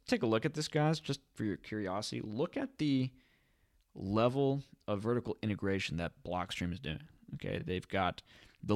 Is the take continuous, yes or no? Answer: yes